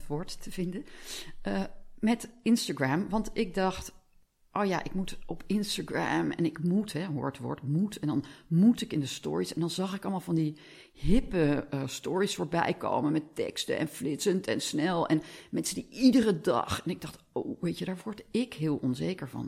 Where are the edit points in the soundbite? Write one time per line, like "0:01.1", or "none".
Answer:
none